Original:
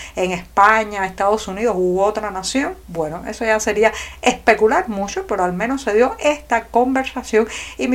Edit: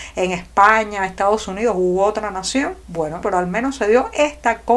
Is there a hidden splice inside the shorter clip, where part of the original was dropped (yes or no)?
yes